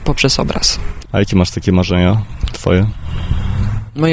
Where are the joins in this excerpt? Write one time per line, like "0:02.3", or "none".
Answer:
0:01.1